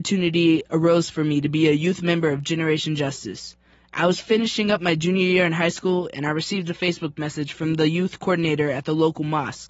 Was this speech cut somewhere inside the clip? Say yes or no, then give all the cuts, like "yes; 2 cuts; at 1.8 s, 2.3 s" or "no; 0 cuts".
no; 0 cuts